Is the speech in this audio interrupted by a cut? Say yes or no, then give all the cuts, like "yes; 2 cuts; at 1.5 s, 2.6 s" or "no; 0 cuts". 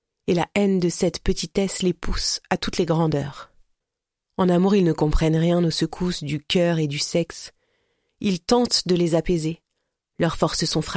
no; 0 cuts